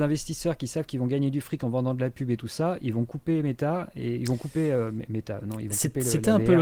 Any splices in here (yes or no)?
no